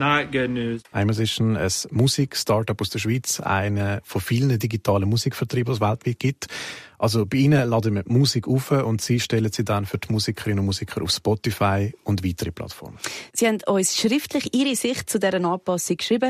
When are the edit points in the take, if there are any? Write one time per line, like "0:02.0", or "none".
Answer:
0:00.9